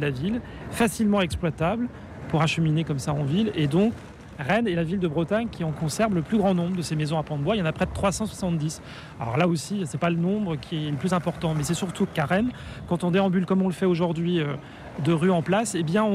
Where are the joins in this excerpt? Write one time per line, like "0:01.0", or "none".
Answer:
none